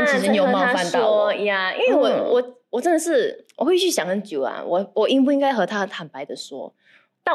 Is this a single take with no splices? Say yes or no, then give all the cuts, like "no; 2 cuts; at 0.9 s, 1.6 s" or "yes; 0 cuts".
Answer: yes; 0 cuts